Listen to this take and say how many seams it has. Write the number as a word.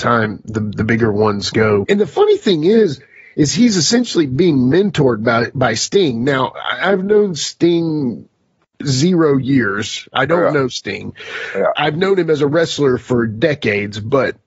one